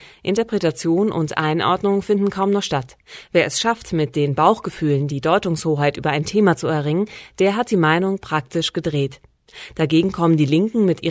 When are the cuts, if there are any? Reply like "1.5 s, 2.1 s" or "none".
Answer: none